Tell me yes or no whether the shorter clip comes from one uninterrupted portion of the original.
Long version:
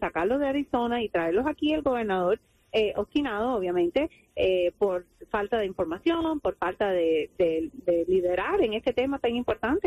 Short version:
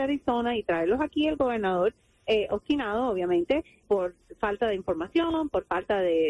no